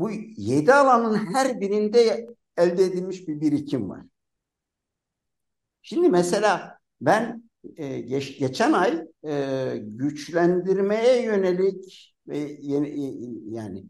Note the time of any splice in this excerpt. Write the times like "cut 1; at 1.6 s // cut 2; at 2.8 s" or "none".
none